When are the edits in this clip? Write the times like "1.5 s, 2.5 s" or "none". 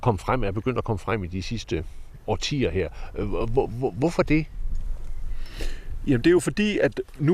none